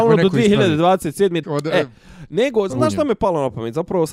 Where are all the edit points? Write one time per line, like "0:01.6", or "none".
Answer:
0:01.4
0:02.7

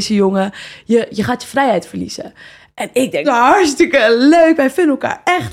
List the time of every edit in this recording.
0:03.2

